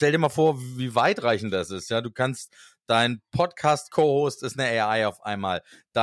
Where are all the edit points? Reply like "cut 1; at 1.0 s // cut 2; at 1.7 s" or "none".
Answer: none